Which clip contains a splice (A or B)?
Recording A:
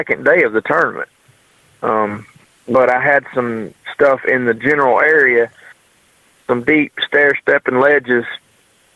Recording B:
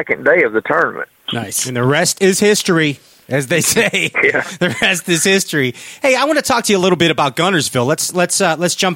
B